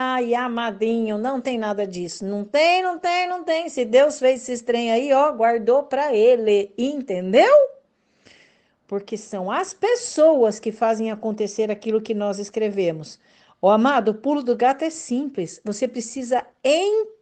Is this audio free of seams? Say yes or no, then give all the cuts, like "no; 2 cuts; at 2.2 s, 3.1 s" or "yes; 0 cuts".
yes; 0 cuts